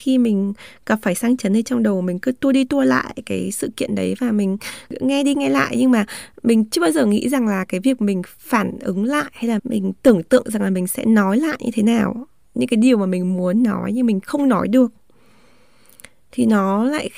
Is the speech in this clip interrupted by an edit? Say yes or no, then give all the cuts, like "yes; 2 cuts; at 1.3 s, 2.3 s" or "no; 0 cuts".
yes; 1 cut; at 9.6 s